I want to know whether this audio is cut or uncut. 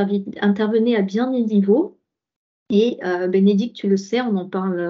uncut